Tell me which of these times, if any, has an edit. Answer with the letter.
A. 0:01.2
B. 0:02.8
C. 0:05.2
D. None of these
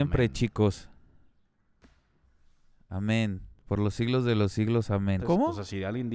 C